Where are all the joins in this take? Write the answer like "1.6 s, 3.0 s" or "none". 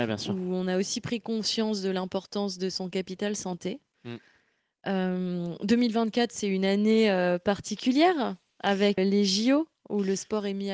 9.0 s

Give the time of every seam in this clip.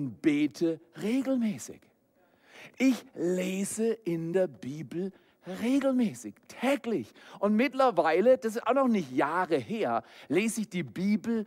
none

